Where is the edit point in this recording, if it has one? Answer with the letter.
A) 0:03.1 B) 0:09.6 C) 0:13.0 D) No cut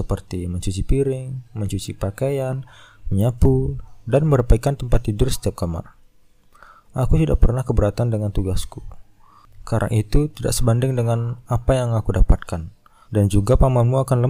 C